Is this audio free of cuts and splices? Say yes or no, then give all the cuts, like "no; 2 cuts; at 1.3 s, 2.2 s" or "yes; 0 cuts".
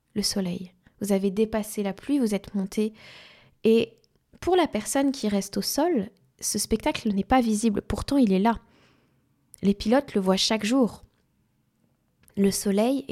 yes; 0 cuts